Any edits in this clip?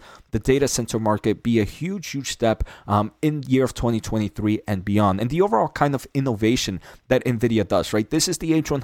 no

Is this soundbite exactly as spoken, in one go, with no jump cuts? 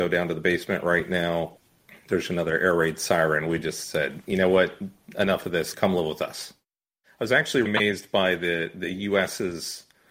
no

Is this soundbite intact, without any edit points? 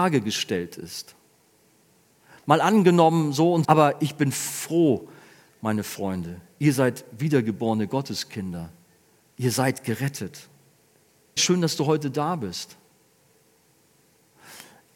no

